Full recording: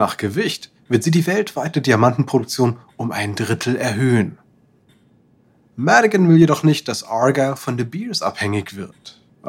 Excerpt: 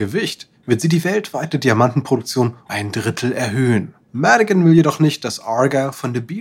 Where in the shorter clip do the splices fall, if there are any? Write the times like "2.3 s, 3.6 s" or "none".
2.7 s, 4.0 s